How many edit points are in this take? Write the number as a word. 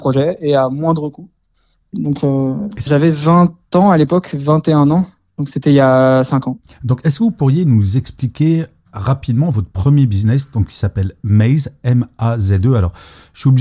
one